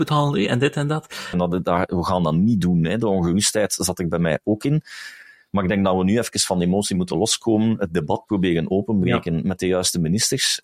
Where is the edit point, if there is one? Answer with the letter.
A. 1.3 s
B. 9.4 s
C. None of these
A